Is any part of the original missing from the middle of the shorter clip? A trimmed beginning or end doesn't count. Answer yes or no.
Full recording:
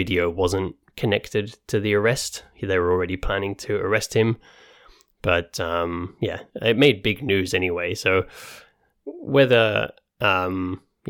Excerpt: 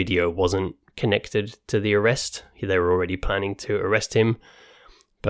no